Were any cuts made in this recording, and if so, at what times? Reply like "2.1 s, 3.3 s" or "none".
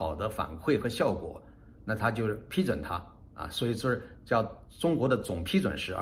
none